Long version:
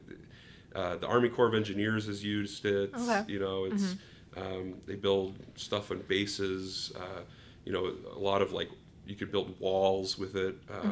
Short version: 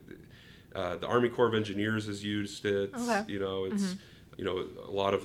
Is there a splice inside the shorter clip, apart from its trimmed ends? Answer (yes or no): yes